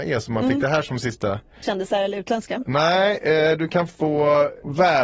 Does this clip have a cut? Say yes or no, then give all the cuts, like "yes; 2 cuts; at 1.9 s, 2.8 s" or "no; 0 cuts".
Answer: yes; 1 cut; at 1.6 s